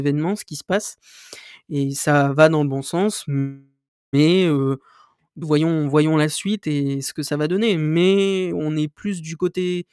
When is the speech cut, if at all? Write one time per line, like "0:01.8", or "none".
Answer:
0:05.4